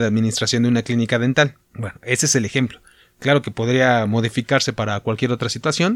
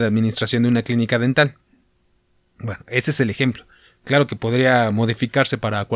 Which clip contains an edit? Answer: first; 1 cut; at 1.6 s

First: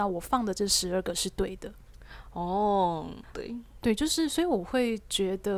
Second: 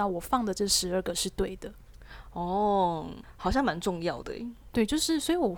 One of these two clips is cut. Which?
first; 1 cut; at 3.3 s

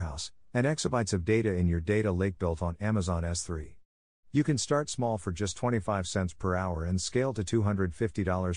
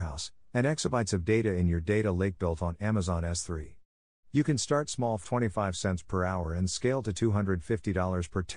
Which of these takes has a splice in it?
second; 1 cut; at 5.2 s

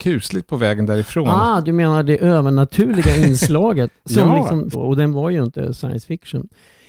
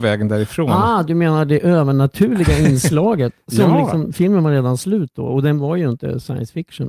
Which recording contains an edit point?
first; 1 cut; at 4.7 s

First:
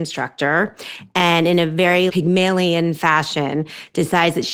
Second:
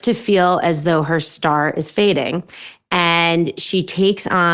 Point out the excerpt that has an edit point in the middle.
first; 1 cut; at 2.1 s

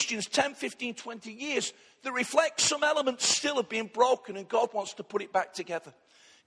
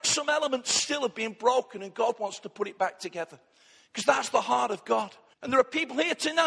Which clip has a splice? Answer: second; 1 cut; at 5.3 s

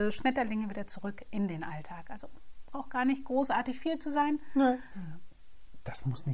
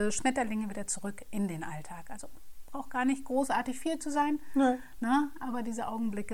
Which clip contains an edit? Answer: first; 1 cut; at 4.9 s

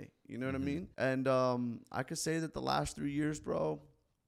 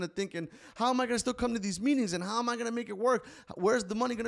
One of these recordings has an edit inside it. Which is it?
first; 1 cut; at 0.9 s

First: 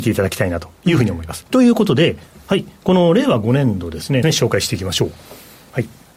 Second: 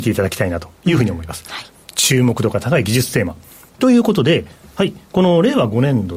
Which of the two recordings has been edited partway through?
first; 2 cuts; at 1.4 s, 4.2 s

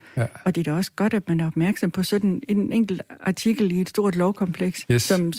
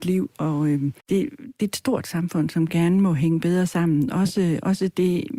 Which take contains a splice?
second; 1 cut; at 1.0 s

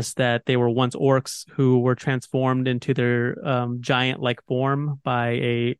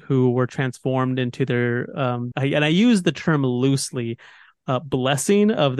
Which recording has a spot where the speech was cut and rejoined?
second; 1 cut; at 2.3 s

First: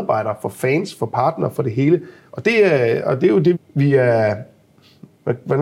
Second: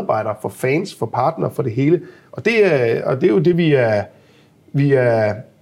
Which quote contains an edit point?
first; 1 cut; at 3.5 s

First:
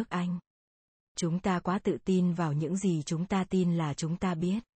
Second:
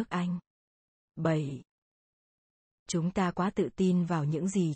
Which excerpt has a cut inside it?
first; 1 cut; at 1.0 s

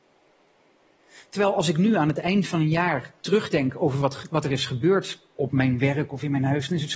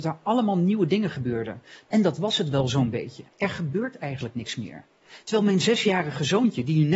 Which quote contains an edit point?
second; 2 cuts; at 1.8 s, 3.3 s

